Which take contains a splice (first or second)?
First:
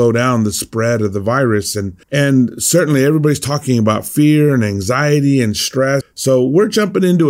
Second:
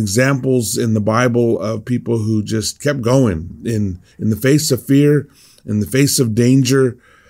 first